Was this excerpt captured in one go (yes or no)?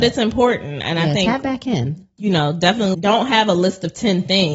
no